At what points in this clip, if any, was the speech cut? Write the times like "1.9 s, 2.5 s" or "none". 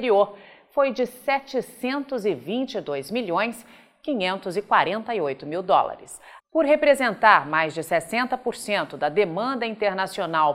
6.4 s